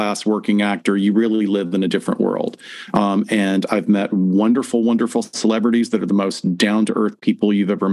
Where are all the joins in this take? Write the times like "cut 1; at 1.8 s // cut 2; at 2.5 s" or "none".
none

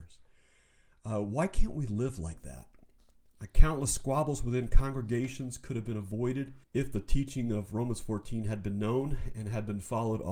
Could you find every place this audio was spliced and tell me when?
cut 1; at 6.6 s

